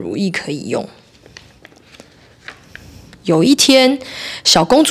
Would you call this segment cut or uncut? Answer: uncut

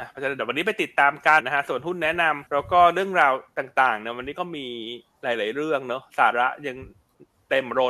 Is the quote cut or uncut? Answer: cut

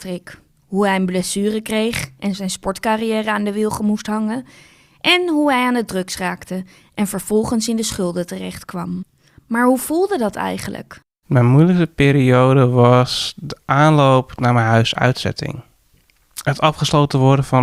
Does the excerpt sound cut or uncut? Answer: uncut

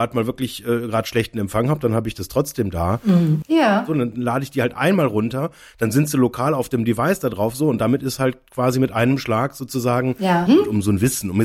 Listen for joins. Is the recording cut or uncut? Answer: cut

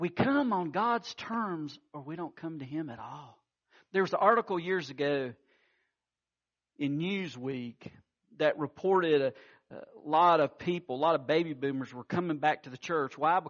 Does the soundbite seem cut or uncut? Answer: uncut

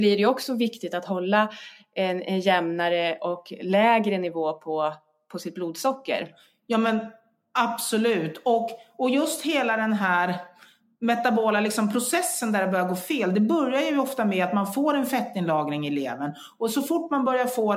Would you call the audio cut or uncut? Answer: uncut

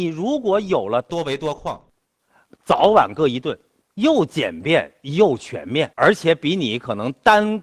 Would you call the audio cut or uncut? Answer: cut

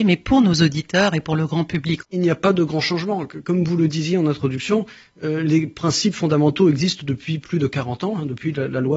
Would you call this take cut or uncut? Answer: cut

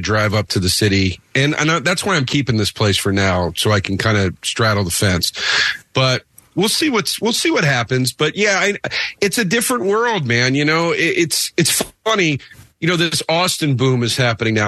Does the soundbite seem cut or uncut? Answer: uncut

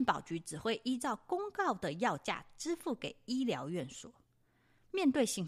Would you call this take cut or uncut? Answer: uncut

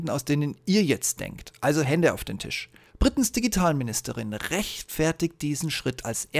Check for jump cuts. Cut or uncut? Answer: cut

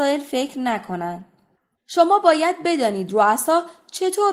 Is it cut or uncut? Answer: cut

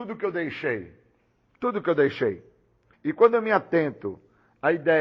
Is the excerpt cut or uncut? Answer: cut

